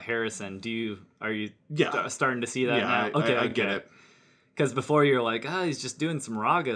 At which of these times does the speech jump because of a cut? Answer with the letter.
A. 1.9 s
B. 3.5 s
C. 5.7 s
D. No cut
D